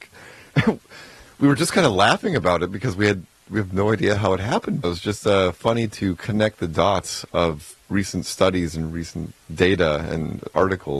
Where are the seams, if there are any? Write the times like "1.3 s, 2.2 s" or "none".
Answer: 4.8 s, 9.4 s

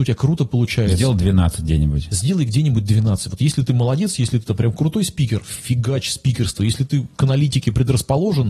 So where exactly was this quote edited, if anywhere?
none

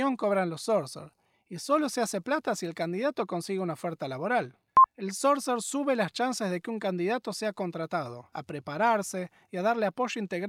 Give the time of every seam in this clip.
8.3 s

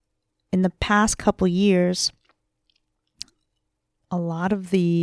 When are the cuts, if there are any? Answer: none

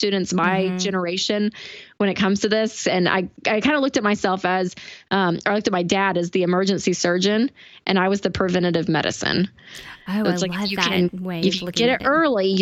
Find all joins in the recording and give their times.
none

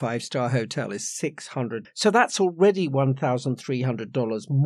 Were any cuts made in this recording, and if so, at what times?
1.8 s

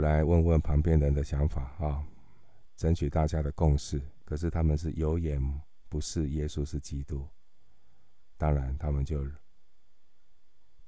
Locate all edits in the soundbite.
4.2 s

